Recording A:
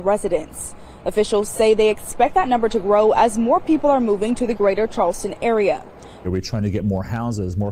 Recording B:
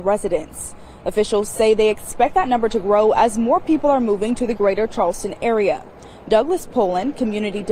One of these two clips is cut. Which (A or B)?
A